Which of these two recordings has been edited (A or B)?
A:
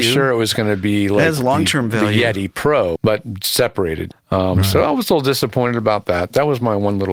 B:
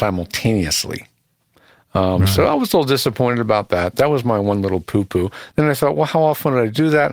A